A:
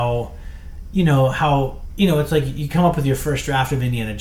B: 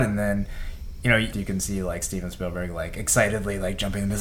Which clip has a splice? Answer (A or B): B